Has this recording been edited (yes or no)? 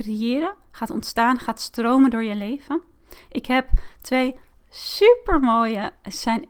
no